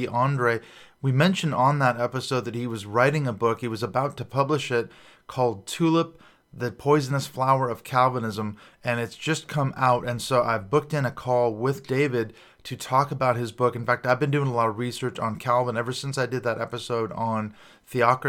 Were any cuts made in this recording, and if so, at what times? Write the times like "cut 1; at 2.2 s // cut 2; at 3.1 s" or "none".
none